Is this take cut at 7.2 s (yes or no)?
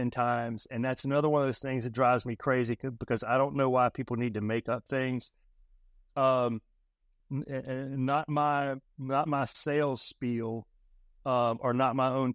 yes